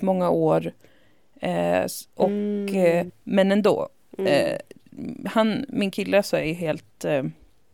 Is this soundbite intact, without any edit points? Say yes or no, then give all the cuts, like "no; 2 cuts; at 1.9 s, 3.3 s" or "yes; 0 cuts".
no; 1 cut; at 3.1 s